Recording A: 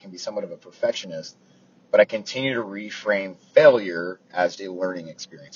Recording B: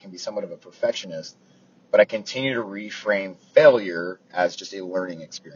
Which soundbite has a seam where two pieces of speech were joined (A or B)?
A